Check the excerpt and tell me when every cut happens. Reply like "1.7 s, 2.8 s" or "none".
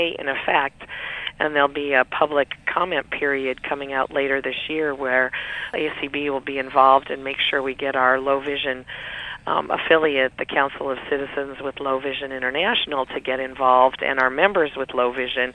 none